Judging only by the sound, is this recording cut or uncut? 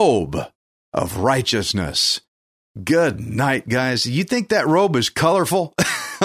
uncut